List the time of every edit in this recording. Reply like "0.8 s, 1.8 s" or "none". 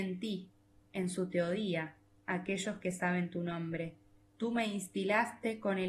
2.2 s, 4.2 s